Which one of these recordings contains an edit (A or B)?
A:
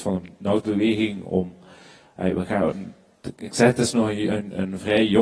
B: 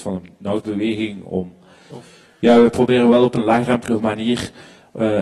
B